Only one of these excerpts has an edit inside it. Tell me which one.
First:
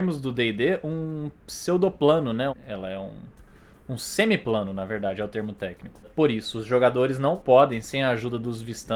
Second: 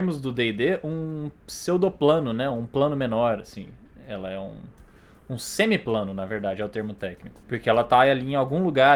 first; 2 cuts; at 2.5 s, 6.0 s

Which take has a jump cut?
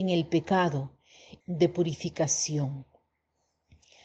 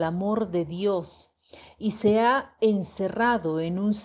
first; 1 cut; at 1.4 s

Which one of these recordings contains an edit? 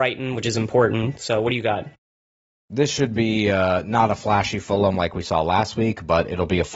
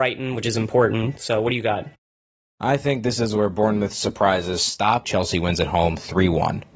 second; 2 cuts; at 2.5 s, 5.0 s

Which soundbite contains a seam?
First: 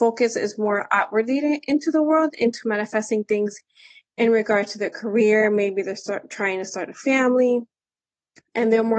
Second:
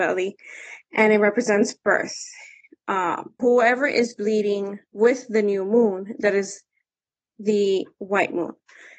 second; 2 cuts; at 3.4 s, 4.9 s

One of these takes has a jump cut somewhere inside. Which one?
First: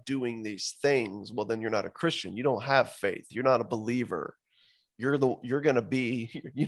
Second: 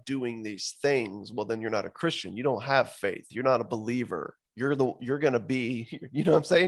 second; 1 cut; at 4.5 s

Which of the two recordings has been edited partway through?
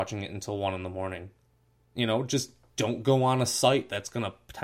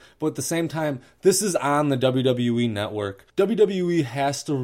second; 1 cut; at 3.3 s

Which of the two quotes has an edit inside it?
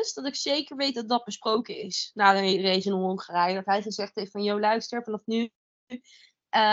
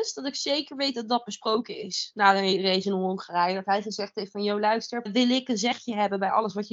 second; 1 cut; at 5.1 s

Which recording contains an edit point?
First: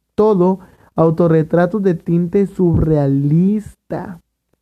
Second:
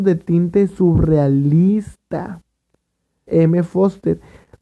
second; 1 cut; at 3.3 s

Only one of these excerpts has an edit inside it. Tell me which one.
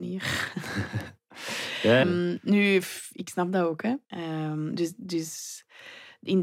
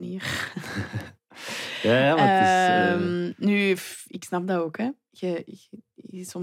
first; 2 cuts; at 2.0 s, 4.0 s

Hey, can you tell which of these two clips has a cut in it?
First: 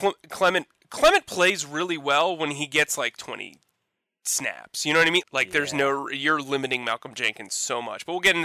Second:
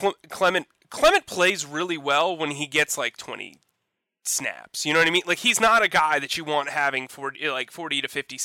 first; 1 cut; at 5.2 s

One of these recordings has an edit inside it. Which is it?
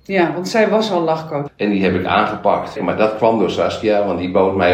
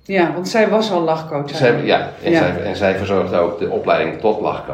first; 2 cuts; at 1.5 s, 2.8 s

